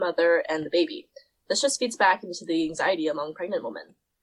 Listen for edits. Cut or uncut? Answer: uncut